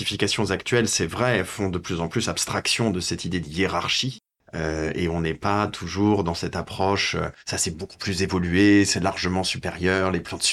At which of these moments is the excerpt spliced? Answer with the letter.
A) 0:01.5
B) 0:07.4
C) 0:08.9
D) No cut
B